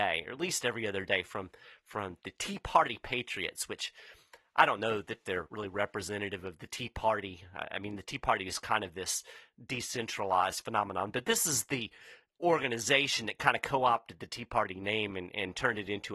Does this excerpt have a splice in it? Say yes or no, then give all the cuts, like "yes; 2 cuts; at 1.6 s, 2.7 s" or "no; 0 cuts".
no; 0 cuts